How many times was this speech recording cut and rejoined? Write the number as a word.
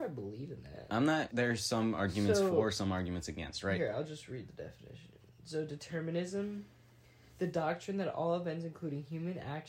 one